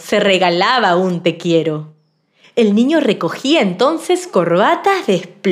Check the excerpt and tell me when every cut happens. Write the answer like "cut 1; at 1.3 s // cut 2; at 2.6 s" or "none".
cut 1; at 2.4 s